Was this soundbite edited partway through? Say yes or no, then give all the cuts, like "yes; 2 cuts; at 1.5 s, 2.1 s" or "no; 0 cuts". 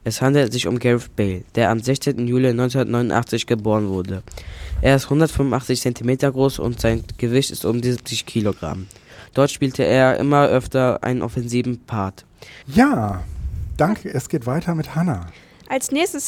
yes; 3 cuts; at 9.3 s, 12.6 s, 14.0 s